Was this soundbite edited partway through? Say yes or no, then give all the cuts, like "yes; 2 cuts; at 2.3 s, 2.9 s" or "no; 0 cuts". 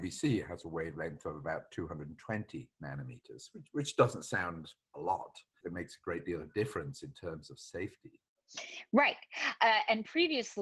yes; 1 cut; at 5.6 s